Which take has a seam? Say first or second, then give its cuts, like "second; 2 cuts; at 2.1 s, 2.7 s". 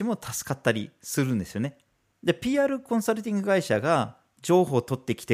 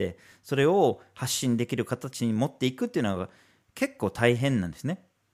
first; 1 cut; at 2.1 s